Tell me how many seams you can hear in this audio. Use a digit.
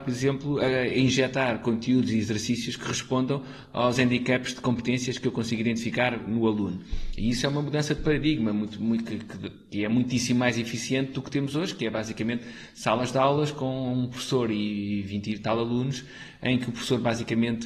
0